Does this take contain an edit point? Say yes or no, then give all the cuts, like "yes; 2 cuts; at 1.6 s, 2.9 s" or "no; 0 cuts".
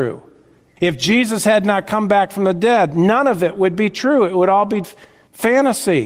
yes; 1 cut; at 4.8 s